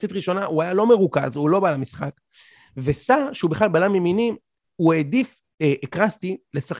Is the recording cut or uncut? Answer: uncut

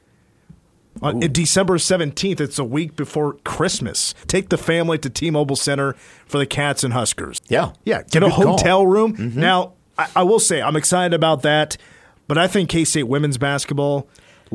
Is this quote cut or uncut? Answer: cut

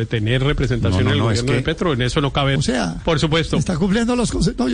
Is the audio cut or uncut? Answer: cut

